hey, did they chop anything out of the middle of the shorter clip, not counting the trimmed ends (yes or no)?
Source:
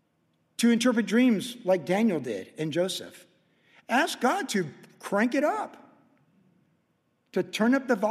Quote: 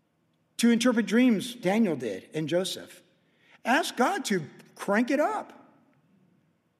yes